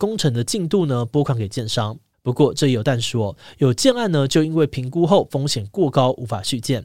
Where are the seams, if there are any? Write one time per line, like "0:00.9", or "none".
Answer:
0:02.1